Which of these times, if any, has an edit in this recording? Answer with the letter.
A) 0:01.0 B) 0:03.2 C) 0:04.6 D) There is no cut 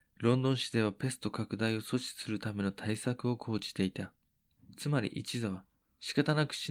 C